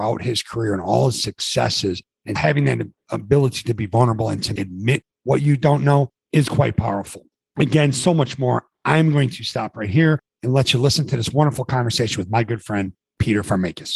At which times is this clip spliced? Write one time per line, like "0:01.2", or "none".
0:02.4